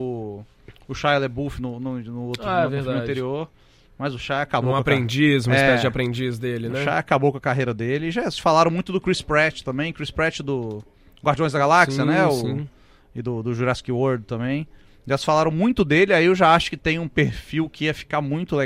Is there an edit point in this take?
no; 0 cuts

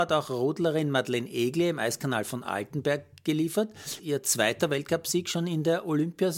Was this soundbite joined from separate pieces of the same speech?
yes; 1 cut; at 4.0 s

